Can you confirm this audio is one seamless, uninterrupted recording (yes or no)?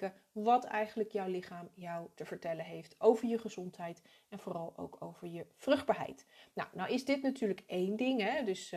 yes